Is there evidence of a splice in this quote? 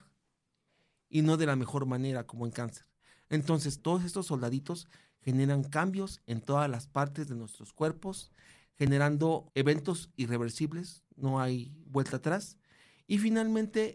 yes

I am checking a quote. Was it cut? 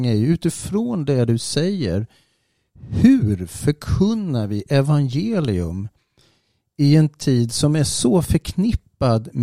no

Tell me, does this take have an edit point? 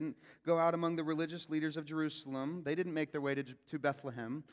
no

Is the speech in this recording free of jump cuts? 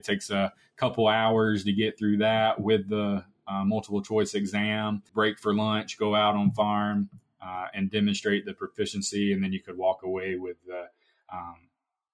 no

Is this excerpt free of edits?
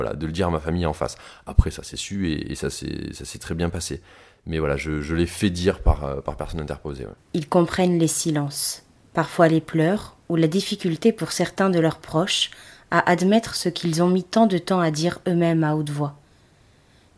no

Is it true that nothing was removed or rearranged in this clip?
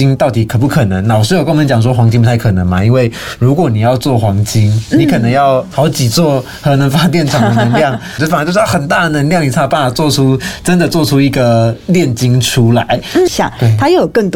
no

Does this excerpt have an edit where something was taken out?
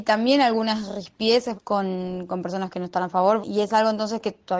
yes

